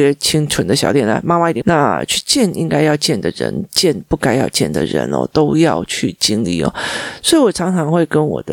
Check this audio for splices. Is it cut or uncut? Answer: cut